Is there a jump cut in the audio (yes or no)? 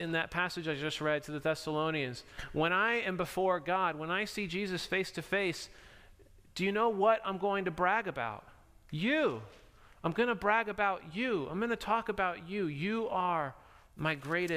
no